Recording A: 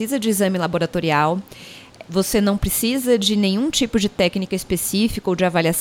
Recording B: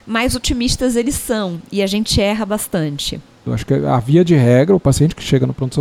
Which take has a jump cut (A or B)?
B